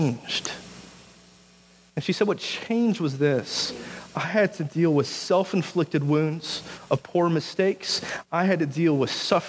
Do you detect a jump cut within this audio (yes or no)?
no